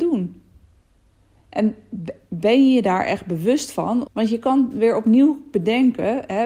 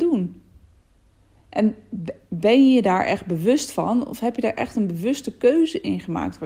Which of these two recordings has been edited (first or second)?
first